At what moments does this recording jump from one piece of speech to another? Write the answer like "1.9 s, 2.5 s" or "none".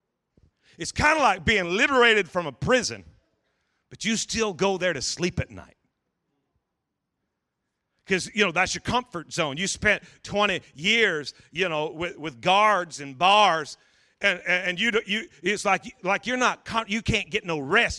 none